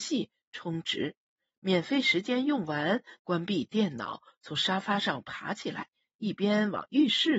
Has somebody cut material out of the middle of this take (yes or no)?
yes